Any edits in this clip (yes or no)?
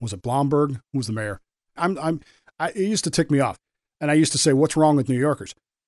yes